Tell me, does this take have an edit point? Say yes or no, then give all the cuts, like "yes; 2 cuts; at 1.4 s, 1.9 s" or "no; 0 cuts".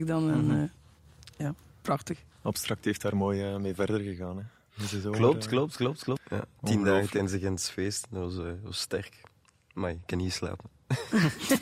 yes; 1 cut; at 6.2 s